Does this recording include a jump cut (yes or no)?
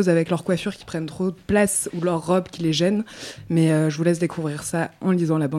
no